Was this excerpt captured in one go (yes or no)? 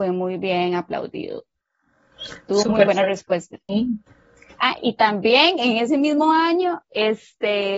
no